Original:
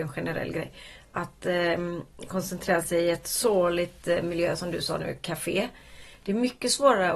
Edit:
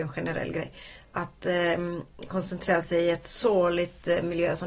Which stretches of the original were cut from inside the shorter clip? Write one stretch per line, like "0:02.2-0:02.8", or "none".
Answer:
none